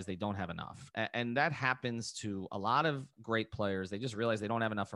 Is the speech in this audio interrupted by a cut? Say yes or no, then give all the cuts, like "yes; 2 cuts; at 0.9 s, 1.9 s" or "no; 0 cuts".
yes; 1 cut; at 3.1 s